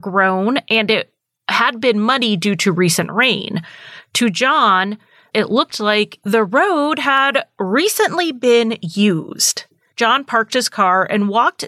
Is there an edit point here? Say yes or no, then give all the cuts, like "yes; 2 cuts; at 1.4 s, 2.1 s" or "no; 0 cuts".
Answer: yes; 2 cuts; at 5.3 s, 9.9 s